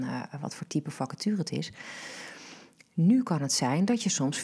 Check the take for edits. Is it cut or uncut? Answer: uncut